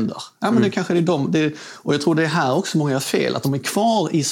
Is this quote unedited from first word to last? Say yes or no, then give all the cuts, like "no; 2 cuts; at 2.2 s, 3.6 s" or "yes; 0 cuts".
yes; 0 cuts